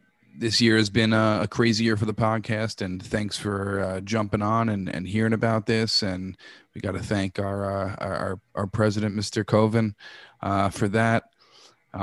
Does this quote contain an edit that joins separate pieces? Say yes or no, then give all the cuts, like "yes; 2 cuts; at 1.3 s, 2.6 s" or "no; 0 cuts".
no; 0 cuts